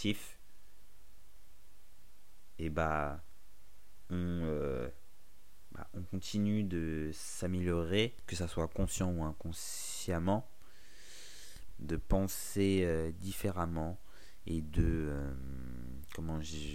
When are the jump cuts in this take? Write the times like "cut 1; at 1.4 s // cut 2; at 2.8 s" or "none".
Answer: cut 1; at 11.7 s